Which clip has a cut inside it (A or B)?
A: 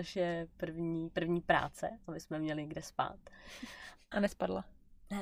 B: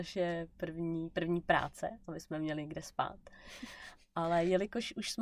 A